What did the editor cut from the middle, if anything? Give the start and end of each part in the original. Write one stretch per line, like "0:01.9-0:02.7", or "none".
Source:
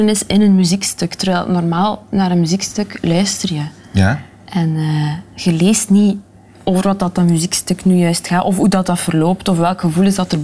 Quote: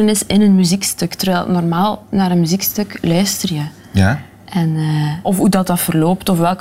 0:05.2-0:08.4